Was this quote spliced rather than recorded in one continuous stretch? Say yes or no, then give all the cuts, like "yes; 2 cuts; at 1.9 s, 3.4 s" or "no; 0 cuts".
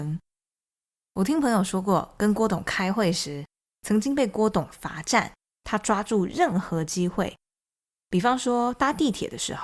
yes; 1 cut; at 5.5 s